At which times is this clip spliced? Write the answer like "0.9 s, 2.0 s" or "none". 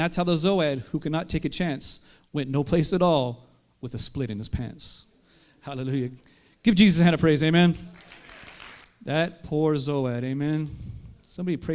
8.8 s